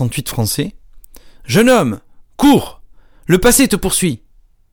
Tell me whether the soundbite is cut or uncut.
uncut